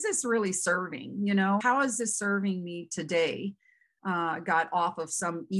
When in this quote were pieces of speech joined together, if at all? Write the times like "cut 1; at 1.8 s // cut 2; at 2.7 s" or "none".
cut 1; at 1.6 s // cut 2; at 4.0 s